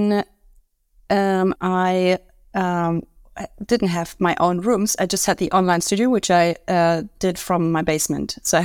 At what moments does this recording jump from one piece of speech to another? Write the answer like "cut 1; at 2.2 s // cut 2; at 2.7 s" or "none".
cut 1; at 1.6 s